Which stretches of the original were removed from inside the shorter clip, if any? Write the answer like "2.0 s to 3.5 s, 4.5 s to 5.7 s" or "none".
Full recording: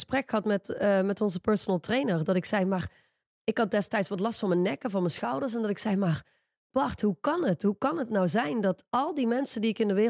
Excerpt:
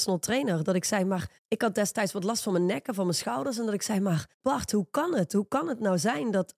3.0 s to 3.3 s, 6.3 s to 6.6 s